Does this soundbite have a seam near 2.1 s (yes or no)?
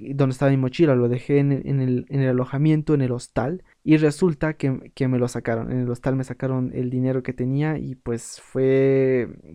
no